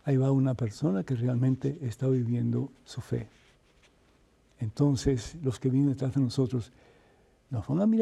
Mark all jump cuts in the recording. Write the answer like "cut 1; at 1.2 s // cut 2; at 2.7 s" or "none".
none